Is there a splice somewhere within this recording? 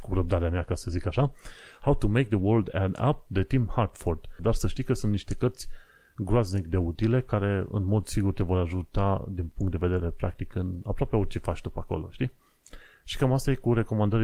yes; 1 cut; at 4.4 s

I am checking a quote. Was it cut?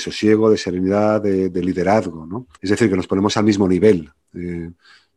yes; 1 cut; at 2.5 s

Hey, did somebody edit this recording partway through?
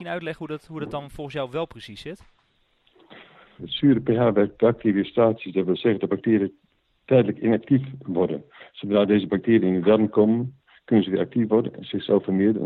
yes; 1 cut; at 3.6 s

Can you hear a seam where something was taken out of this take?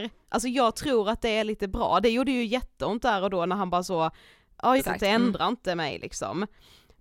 yes; 1 cut; at 4.8 s

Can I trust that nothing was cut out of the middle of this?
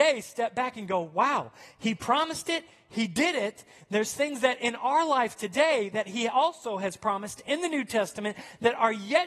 yes; 0 cuts

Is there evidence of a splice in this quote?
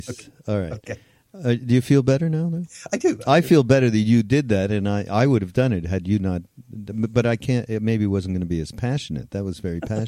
no; 0 cuts

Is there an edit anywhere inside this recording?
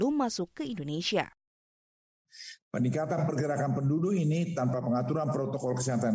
yes; 1 cut; at 2.6 s

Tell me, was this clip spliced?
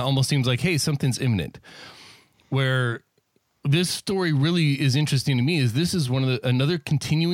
no; 0 cuts

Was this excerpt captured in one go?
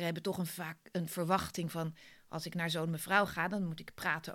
yes; 0 cuts

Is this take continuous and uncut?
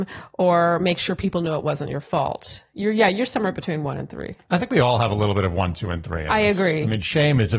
yes; 0 cuts

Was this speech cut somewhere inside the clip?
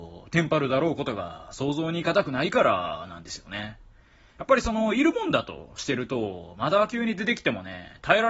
no; 0 cuts

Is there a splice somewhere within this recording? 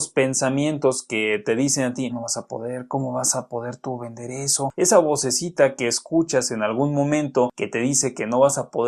yes; 2 cuts; at 2.1 s, 4.7 s

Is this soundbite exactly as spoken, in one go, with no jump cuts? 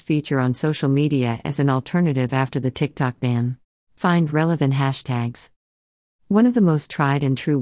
no; 1 cut; at 3.8 s

